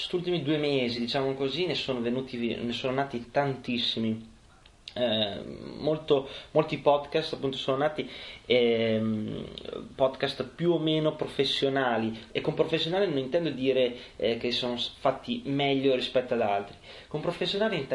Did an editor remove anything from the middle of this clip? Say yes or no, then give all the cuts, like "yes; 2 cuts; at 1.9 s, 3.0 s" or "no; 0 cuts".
no; 0 cuts